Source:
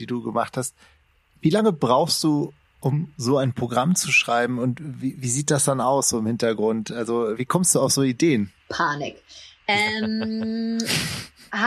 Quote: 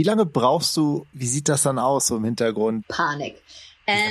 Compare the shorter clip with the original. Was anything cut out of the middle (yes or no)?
yes